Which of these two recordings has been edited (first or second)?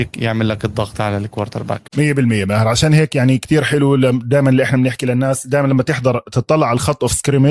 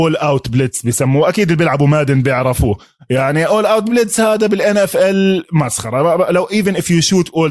first